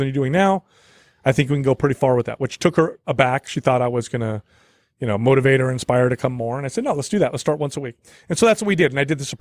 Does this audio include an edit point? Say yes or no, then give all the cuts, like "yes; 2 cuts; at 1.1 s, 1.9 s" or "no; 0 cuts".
no; 0 cuts